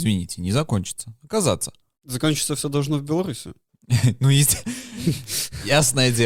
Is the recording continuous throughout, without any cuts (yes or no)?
yes